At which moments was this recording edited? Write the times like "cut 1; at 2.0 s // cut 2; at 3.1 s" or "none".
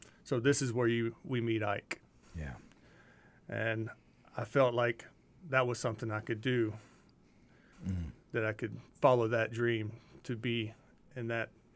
cut 1; at 2.2 s // cut 2; at 7.7 s // cut 3; at 8.9 s